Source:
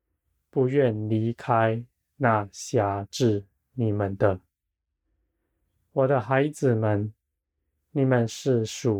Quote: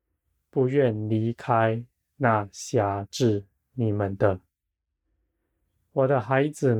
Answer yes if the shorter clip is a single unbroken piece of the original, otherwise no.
yes